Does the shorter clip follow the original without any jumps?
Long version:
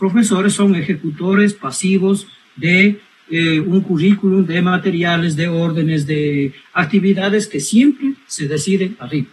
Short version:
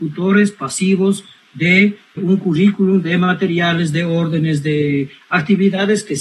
no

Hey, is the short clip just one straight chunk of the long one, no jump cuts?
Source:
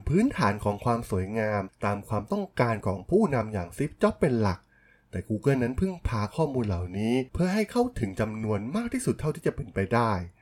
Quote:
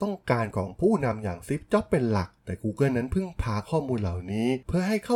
no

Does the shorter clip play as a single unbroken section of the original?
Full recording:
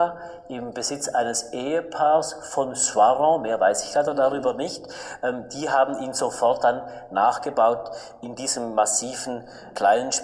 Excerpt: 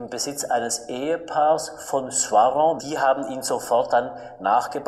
no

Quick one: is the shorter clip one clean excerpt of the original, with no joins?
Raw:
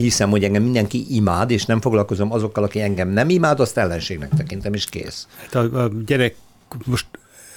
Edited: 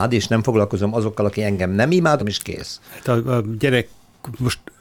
no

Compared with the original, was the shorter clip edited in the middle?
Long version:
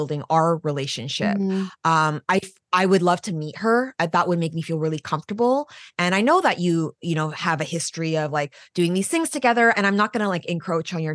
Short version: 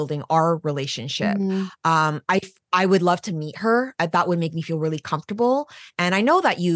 no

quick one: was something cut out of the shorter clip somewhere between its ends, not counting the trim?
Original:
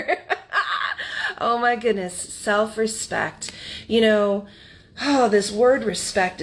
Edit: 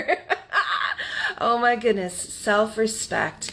no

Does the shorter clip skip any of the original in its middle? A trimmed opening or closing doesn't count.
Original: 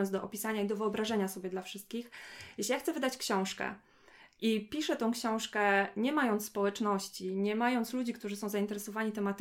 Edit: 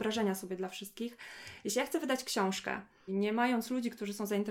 yes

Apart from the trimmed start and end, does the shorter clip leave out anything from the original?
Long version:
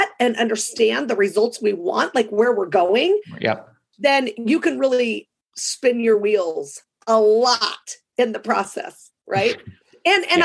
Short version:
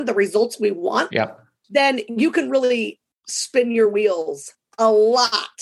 yes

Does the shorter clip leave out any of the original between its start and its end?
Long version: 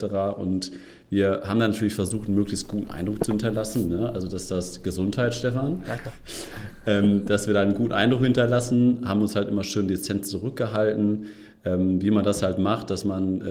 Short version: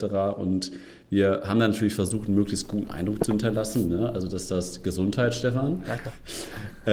no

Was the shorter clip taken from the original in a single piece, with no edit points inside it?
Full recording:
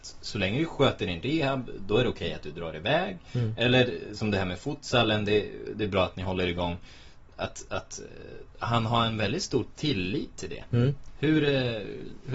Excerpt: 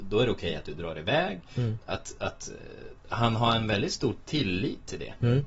no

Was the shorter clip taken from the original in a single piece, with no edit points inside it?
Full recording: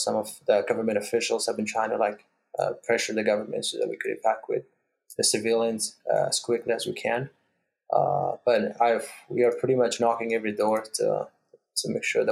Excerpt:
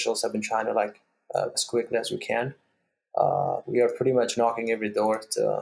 no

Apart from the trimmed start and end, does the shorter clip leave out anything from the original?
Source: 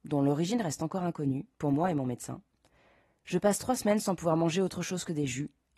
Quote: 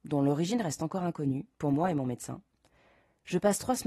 no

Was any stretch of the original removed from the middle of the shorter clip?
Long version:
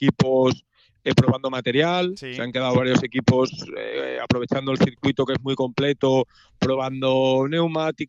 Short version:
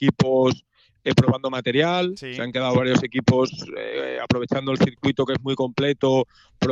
no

